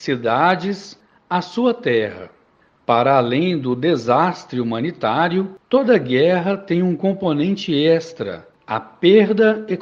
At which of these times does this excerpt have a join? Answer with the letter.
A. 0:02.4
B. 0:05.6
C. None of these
C